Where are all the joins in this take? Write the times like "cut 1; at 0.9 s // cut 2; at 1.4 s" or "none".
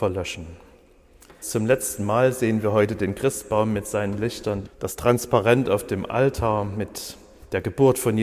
cut 1; at 1.4 s // cut 2; at 4.6 s